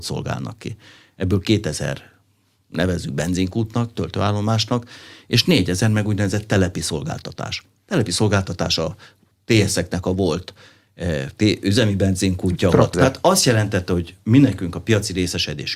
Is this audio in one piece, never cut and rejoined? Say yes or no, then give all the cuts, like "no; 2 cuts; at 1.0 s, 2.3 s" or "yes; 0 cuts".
no; 1 cut; at 12.9 s